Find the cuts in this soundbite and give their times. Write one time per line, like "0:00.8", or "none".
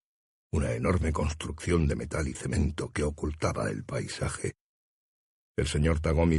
none